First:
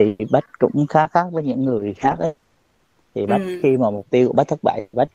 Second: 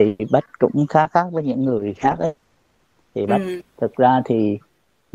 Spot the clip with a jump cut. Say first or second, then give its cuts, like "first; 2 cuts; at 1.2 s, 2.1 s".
second; 1 cut; at 3.6 s